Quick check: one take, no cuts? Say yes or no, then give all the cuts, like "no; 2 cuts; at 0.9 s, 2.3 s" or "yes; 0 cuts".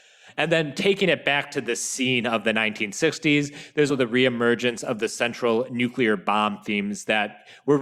no; 1 cut; at 3.9 s